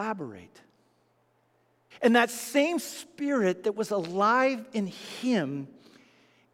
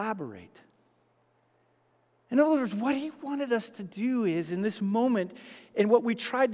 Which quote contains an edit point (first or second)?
first